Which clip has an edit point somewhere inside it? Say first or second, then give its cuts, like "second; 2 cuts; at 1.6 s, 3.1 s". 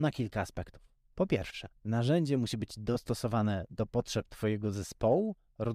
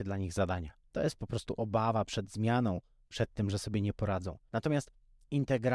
second; 1 cut; at 4.5 s